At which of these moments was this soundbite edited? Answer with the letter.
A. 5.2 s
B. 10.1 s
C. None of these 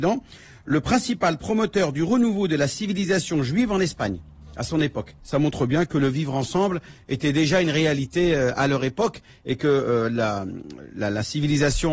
A